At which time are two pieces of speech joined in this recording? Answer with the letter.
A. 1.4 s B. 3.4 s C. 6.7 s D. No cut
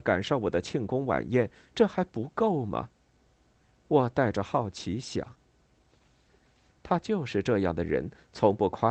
C